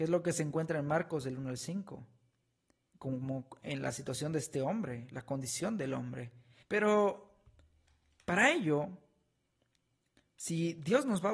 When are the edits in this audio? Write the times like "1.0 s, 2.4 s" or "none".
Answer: 6.6 s